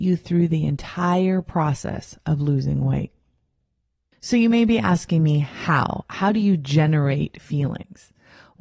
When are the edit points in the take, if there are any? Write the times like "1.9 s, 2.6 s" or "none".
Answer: none